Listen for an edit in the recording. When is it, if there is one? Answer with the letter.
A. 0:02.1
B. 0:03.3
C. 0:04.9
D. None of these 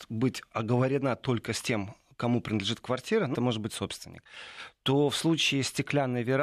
B